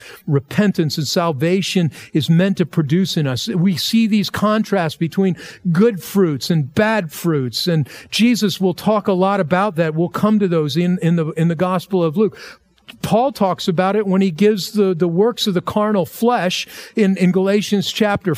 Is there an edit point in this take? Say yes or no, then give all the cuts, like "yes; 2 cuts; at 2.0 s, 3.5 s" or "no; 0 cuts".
no; 0 cuts